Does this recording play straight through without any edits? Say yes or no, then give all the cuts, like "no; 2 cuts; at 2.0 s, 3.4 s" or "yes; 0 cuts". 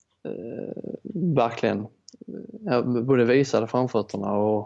yes; 0 cuts